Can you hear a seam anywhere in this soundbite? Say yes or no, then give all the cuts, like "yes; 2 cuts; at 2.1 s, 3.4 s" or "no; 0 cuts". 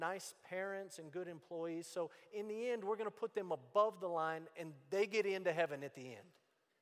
no; 0 cuts